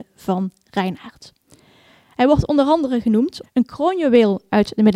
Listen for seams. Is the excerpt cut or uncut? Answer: cut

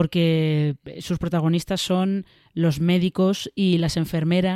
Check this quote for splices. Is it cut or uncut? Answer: uncut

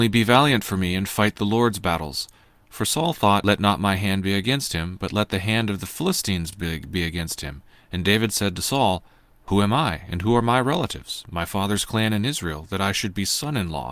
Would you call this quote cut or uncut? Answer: uncut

